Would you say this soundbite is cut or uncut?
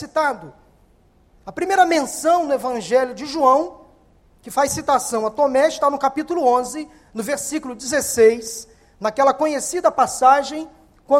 uncut